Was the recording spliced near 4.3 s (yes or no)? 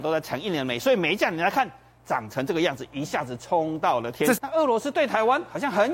yes